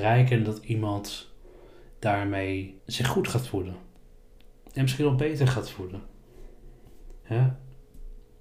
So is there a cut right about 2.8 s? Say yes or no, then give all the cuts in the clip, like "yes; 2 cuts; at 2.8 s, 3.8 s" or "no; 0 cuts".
yes; 1 cut; at 2.8 s